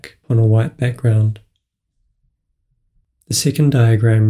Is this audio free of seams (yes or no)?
yes